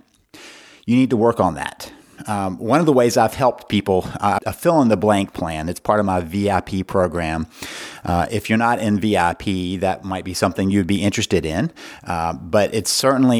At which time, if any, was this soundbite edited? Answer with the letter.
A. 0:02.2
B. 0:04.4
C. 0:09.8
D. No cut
B